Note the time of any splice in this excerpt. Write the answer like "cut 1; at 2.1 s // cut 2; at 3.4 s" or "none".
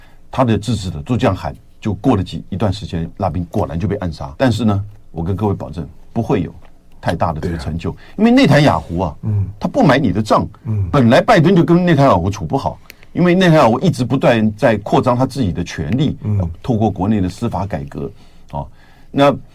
cut 1; at 4.4 s